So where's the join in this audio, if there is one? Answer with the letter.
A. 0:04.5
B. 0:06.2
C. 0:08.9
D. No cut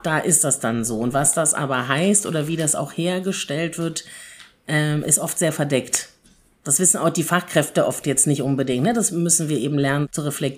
D